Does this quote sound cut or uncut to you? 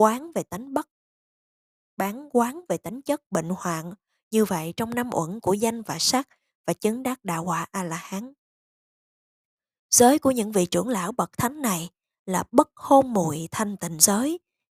uncut